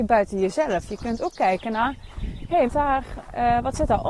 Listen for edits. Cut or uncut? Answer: cut